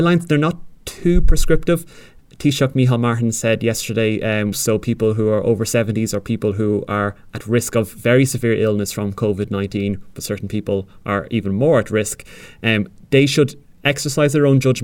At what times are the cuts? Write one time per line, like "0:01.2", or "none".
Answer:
0:04.5
0:10.1